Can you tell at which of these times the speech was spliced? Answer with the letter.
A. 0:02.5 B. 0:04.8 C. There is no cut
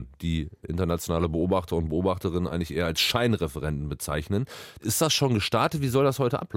B